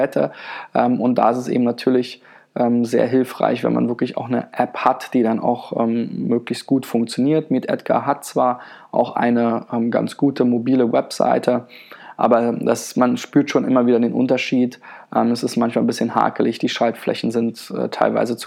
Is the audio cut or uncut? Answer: uncut